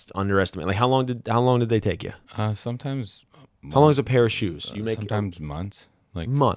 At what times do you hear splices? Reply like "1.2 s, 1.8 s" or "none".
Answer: 2.2 s